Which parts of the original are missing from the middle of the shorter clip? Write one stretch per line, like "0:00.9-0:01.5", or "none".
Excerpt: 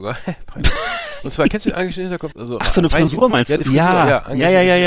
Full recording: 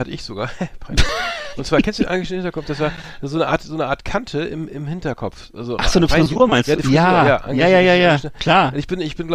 0:02.6-0:05.5